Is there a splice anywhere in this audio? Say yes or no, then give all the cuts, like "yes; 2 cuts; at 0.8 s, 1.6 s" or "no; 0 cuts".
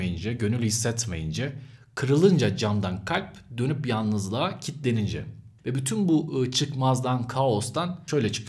no; 0 cuts